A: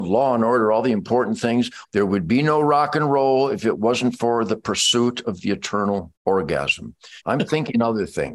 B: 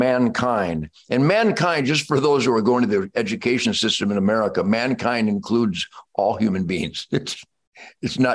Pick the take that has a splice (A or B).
A